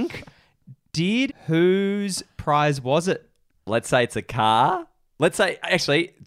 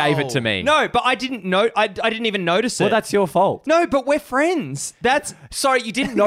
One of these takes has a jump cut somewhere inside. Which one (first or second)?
first